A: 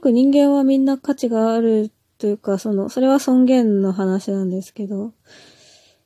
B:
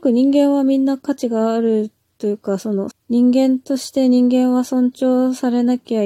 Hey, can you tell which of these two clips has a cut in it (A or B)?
B